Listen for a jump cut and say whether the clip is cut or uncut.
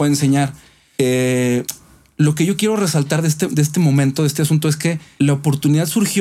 uncut